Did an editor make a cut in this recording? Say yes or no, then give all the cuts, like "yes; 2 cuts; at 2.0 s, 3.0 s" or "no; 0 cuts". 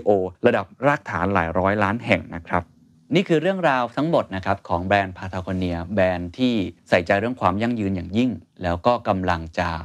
yes; 1 cut; at 6.8 s